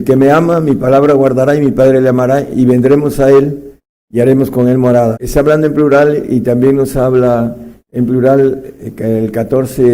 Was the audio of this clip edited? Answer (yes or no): yes